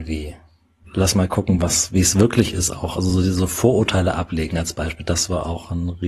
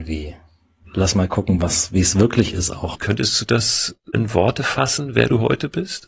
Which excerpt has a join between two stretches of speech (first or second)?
second